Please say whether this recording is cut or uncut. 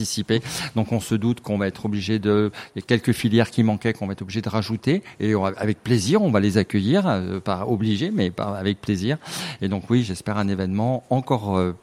uncut